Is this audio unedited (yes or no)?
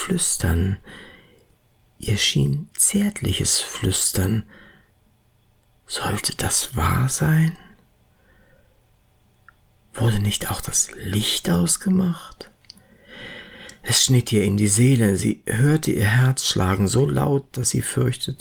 yes